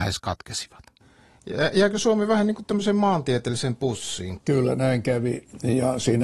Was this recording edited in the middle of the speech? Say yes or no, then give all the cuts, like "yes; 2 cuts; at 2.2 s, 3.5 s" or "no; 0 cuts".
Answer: no; 0 cuts